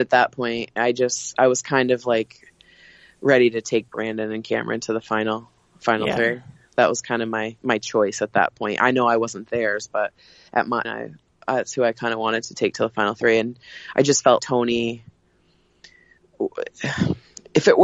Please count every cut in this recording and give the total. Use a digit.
2